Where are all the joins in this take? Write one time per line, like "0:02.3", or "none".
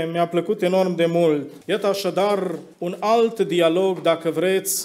0:01.6
0:02.7

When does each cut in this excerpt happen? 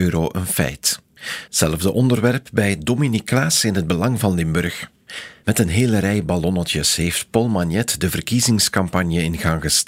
0:01.5

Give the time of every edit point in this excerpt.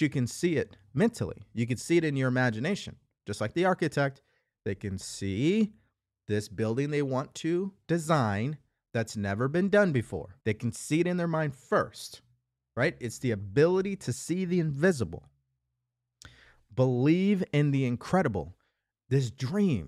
0:10.4
0:18.9

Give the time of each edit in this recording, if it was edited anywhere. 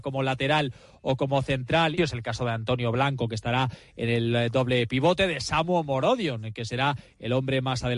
0:02.0

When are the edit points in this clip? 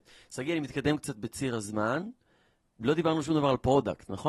none

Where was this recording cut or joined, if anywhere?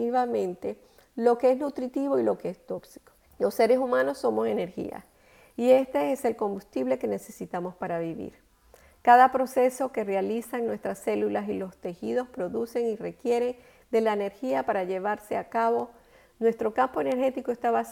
0:03.2

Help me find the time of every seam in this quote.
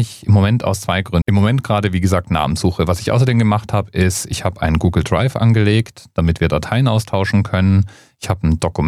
0:01.2

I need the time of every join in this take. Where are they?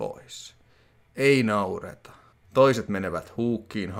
0:01.1
0:02.4

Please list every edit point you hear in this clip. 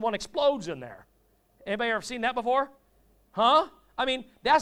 0:03.2

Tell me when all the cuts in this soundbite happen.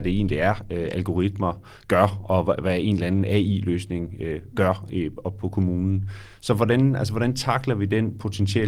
none

